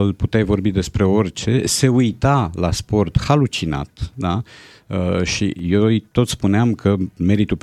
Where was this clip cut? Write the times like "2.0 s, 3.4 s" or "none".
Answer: none